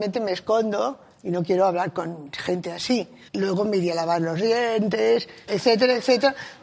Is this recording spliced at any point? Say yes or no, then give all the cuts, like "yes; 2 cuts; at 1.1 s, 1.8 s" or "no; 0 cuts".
yes; 2 cuts; at 3.3 s, 5.5 s